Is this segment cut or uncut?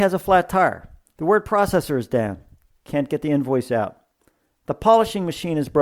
cut